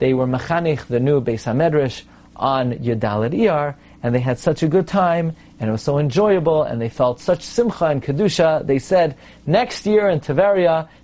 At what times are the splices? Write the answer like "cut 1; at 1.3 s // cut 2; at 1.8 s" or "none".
none